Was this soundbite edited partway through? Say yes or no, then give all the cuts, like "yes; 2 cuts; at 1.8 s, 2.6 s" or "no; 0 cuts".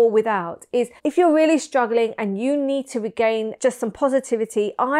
yes; 2 cuts; at 1.0 s, 3.6 s